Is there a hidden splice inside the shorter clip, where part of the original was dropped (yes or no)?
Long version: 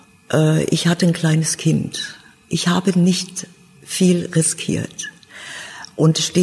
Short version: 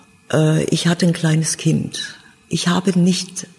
no